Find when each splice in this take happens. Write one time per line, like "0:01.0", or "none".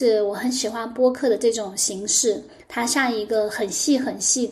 none